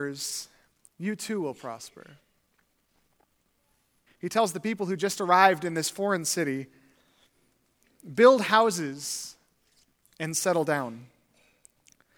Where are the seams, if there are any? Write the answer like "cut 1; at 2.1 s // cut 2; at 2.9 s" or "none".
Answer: cut 1; at 4.1 s